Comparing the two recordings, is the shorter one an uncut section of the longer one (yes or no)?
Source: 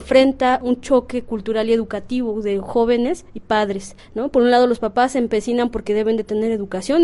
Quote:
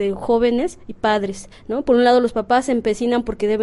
yes